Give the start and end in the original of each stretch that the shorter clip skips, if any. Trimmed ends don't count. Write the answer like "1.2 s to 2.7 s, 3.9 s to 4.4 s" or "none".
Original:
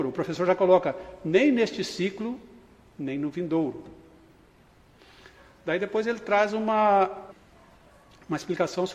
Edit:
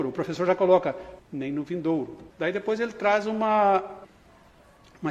1.2 s to 2.9 s, 4.0 s to 5.6 s